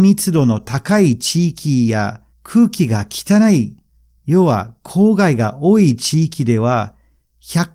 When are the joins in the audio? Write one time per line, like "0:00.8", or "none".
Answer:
none